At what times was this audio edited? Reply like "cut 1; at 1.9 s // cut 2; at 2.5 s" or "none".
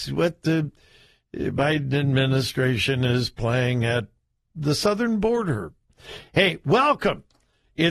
none

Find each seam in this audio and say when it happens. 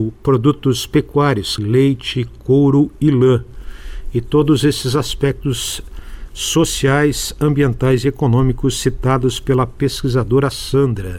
cut 1; at 1.6 s

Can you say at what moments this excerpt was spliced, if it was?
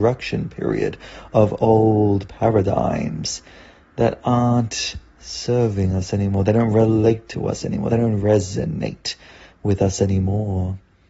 none

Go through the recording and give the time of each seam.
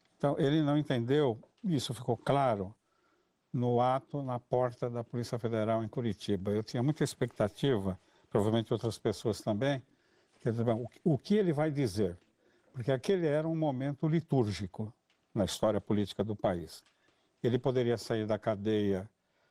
none

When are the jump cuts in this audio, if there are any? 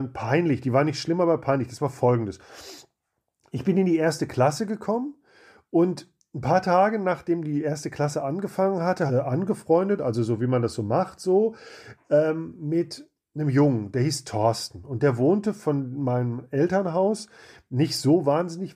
cut 1; at 9.1 s

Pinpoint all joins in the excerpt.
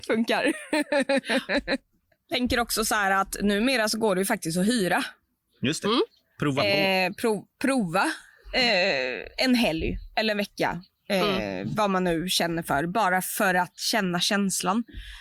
none

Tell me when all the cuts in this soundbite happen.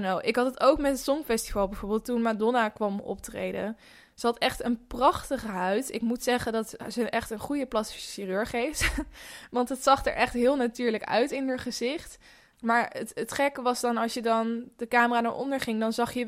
cut 1; at 12.5 s

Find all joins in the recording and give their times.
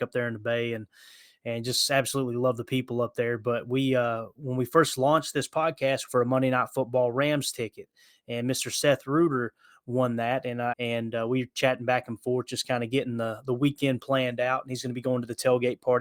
cut 1; at 6.1 s // cut 2; at 10.7 s

